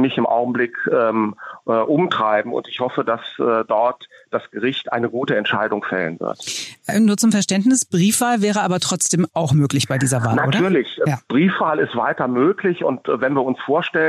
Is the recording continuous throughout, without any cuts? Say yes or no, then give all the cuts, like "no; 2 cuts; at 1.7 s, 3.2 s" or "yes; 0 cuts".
yes; 0 cuts